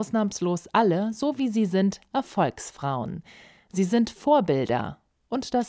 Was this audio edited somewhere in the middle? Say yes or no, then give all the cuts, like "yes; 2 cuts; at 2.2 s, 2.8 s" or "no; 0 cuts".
no; 0 cuts